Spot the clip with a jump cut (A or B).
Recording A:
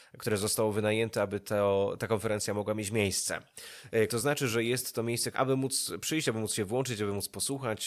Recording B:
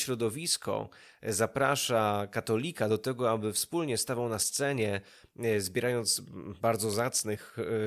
A